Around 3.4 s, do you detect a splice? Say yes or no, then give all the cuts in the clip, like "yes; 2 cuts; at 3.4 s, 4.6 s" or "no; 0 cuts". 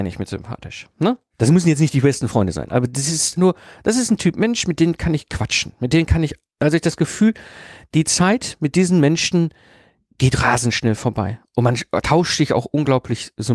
yes; 1 cut; at 3.4 s